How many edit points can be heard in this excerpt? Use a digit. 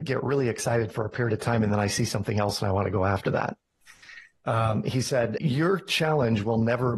2